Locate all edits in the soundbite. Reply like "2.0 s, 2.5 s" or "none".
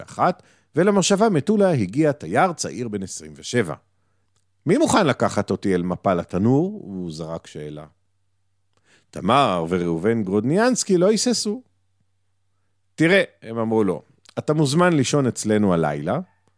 none